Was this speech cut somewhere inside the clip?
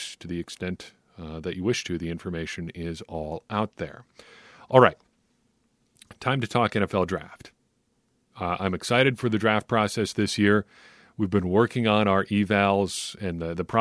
no; 0 cuts

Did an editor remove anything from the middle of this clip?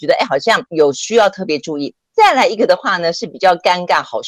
no; 0 cuts

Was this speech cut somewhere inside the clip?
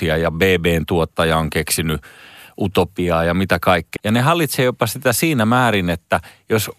yes; 1 cut; at 4.0 s

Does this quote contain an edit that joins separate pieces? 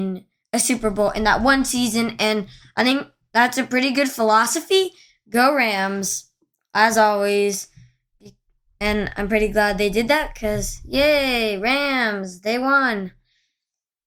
no; 0 cuts

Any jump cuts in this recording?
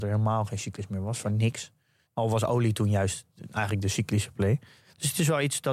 no; 0 cuts

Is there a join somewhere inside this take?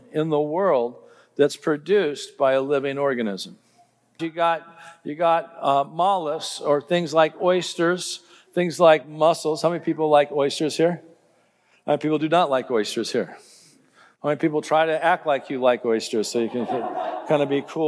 yes; 1 cut; at 4.2 s

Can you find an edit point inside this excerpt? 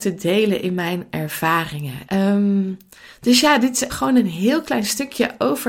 yes; 2 cuts; at 2.1 s, 3.9 s

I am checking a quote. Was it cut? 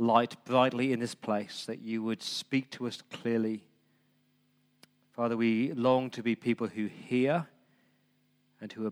no; 0 cuts

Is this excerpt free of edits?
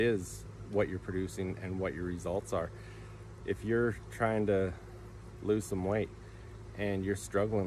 no; 1 cut; at 3.4 s

